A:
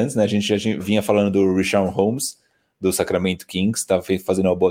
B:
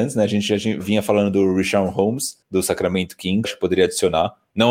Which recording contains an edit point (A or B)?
B